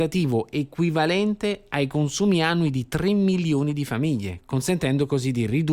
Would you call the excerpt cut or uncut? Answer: uncut